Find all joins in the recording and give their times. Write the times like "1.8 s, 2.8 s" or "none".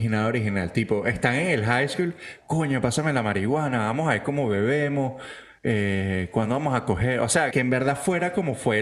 7.5 s